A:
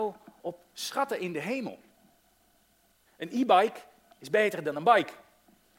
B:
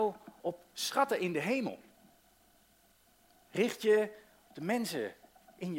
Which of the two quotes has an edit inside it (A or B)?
A